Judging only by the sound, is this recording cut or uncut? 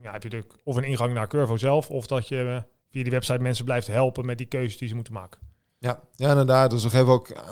uncut